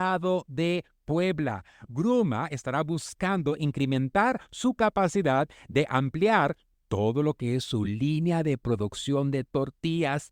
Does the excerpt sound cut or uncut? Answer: uncut